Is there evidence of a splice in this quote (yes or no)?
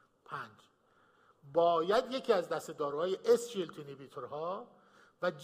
no